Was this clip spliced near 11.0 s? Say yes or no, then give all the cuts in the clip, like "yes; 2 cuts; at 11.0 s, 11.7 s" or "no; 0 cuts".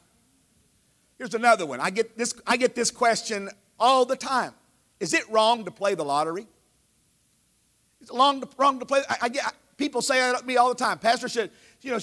no; 1 cut; at 1.1 s